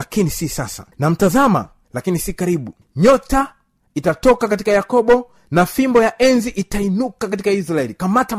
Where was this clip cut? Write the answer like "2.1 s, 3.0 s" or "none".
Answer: 0.9 s